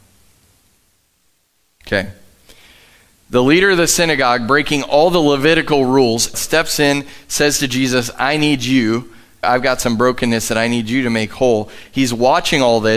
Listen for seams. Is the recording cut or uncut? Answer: cut